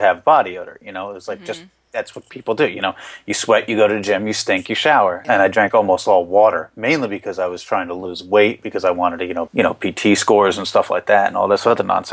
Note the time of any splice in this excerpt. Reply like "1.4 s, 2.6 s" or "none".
5.2 s, 9.5 s

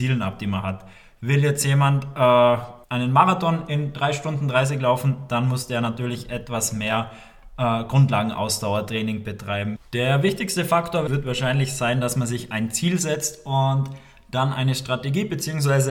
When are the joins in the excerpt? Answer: 2.8 s, 9.8 s, 11.1 s

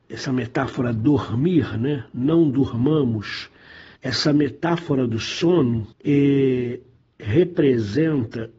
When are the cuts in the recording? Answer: 4.0 s, 5.9 s

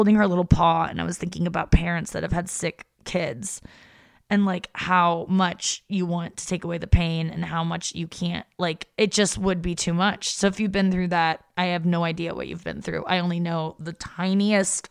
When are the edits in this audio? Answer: none

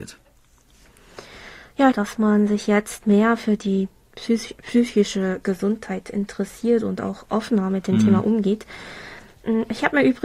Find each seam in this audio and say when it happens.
1.9 s

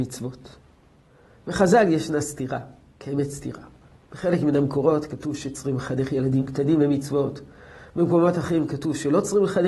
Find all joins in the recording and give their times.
none

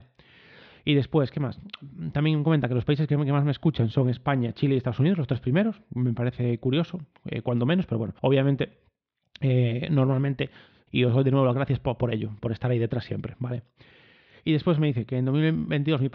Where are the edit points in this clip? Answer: 8.2 s, 10.9 s

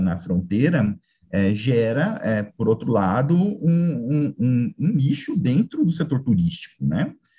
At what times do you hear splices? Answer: none

